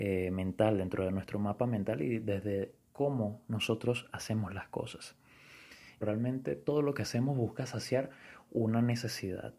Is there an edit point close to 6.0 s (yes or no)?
yes